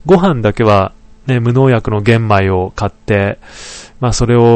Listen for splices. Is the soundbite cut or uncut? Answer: uncut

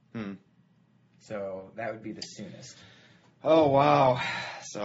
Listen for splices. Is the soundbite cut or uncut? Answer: uncut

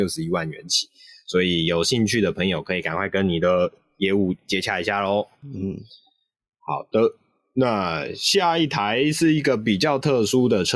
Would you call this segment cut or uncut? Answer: uncut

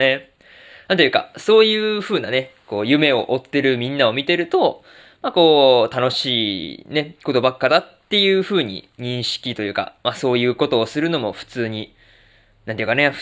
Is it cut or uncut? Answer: uncut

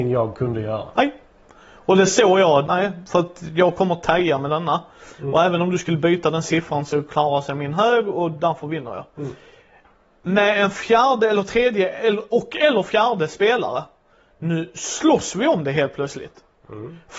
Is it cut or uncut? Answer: cut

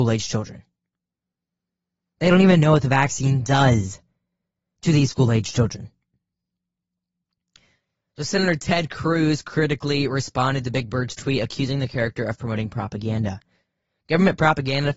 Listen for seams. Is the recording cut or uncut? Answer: uncut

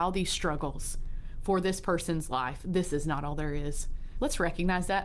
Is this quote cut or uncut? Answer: cut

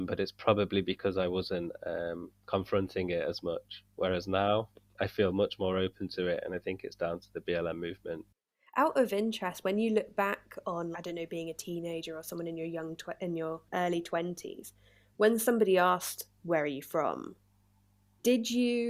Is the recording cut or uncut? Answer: cut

